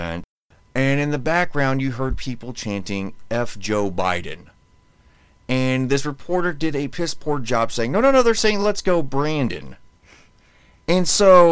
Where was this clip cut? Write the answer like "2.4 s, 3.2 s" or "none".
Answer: none